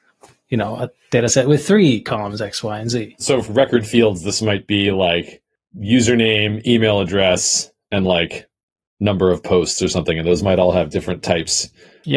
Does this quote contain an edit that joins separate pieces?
yes; 1 cut; at 3.5 s

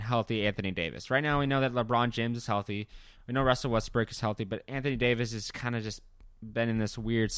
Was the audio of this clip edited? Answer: no; 0 cuts

